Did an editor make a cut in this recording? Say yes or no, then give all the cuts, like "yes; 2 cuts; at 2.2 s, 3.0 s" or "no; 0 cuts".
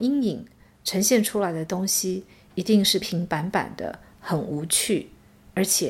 yes; 1 cut; at 3.0 s